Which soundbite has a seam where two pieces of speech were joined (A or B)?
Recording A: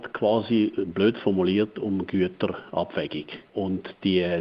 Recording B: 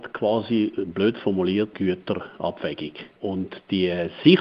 B